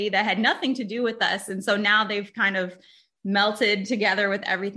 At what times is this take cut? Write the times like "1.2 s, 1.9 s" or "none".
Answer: none